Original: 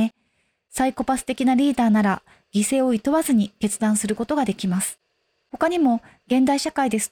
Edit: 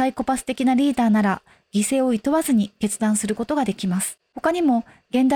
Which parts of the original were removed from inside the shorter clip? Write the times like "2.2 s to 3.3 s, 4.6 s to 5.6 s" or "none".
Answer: 5.1 s to 5.4 s